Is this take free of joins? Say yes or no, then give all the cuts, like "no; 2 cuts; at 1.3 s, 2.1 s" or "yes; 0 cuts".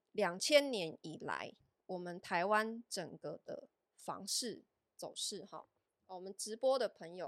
yes; 0 cuts